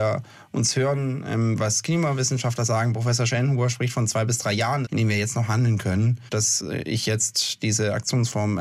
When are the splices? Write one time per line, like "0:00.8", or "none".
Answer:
0:04.8
0:06.3